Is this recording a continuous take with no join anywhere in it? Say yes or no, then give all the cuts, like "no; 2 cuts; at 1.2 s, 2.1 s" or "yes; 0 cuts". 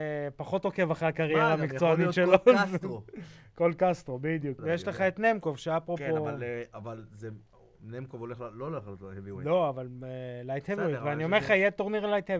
no; 1 cut; at 4.6 s